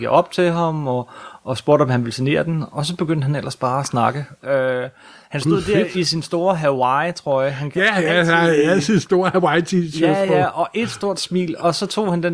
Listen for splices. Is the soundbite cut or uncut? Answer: uncut